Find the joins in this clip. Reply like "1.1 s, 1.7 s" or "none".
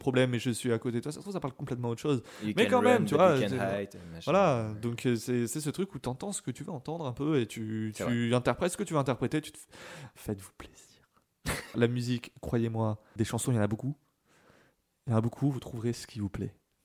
11.7 s, 13.2 s